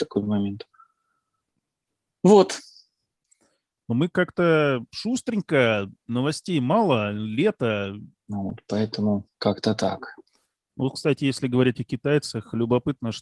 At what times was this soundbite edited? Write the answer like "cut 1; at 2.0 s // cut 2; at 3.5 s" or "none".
cut 1; at 8.1 s